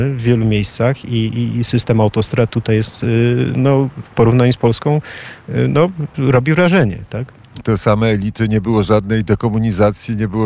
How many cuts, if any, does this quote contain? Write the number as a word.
one